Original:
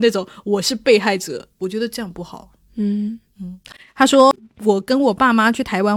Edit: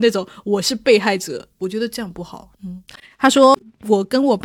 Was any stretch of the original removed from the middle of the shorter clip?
yes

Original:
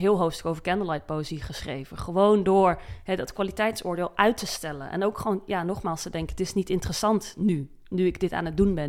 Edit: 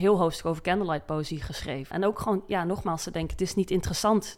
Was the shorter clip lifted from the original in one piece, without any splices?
no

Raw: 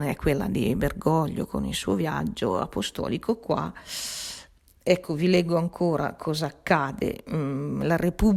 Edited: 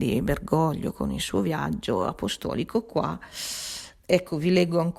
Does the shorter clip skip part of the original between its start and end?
yes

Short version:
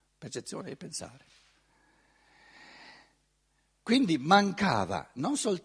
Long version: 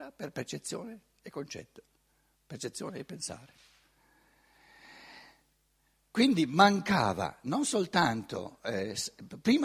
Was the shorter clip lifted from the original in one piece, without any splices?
yes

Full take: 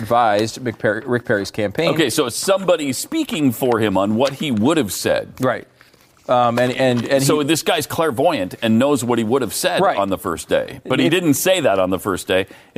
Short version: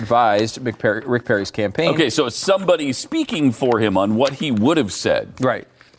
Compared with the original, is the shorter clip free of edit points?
yes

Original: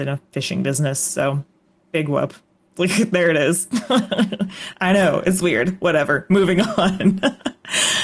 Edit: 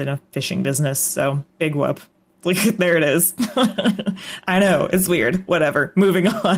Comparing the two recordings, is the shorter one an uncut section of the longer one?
no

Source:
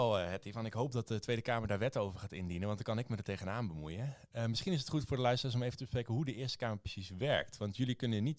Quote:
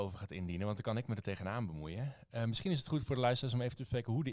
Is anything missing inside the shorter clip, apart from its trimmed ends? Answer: no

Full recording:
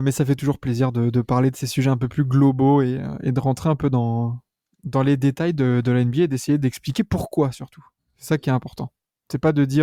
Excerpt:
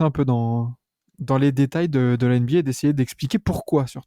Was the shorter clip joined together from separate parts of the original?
no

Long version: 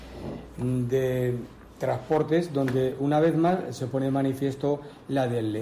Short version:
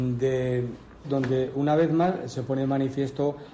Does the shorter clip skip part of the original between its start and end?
yes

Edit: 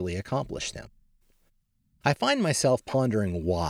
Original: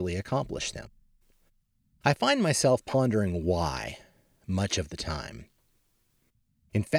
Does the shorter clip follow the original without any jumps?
yes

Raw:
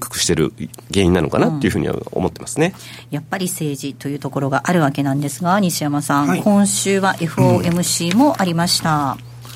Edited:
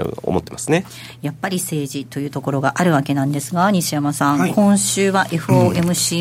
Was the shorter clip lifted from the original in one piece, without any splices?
yes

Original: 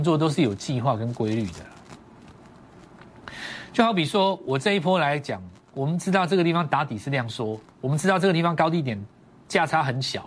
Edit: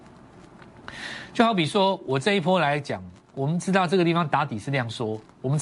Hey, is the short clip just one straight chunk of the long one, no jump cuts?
yes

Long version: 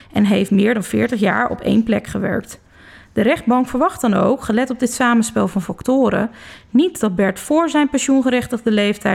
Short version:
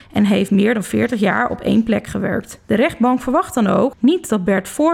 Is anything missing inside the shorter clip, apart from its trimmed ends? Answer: yes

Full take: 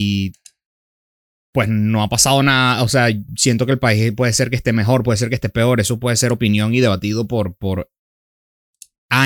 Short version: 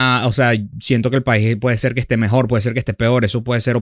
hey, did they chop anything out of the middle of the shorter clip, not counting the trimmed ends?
no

